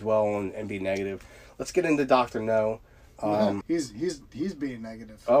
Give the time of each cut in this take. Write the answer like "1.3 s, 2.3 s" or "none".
3.6 s